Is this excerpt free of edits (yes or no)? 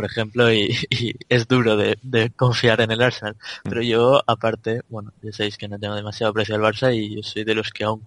yes